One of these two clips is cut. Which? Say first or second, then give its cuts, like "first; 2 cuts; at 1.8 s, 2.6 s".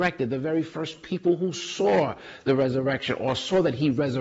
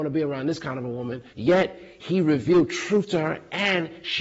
second; 1 cut; at 1.3 s